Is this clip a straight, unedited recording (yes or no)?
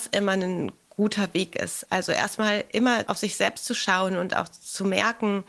yes